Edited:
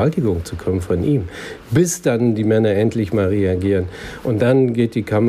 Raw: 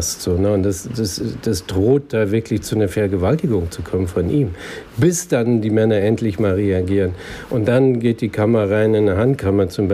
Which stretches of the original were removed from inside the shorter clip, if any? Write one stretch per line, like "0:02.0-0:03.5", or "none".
none